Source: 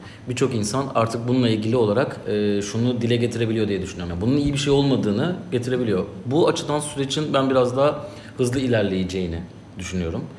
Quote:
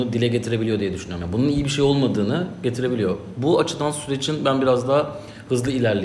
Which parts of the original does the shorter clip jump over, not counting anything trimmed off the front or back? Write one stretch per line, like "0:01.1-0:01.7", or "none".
none